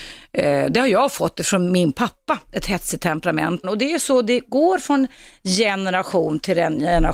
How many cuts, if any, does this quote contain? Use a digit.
1